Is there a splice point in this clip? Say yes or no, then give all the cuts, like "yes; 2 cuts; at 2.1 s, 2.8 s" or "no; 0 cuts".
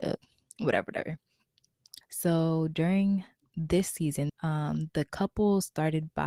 yes; 2 cuts; at 2.0 s, 4.3 s